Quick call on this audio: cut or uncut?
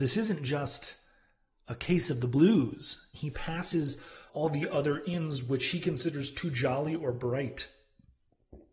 cut